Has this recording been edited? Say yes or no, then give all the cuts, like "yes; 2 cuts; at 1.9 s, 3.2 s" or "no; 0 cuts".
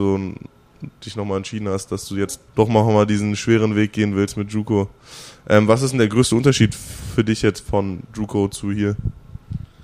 yes; 1 cut; at 2.5 s